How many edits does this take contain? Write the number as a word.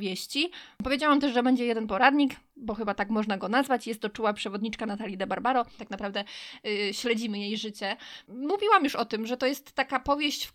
one